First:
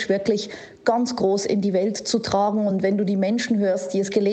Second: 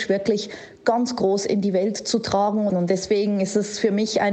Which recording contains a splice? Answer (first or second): second